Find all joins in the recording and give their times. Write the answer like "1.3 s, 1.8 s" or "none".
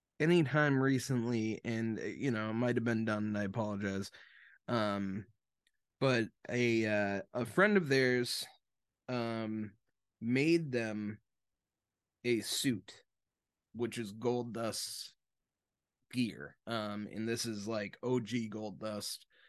16.6 s